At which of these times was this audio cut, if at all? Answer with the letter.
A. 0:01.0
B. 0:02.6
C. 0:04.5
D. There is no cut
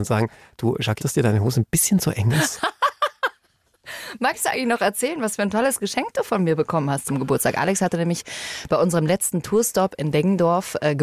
A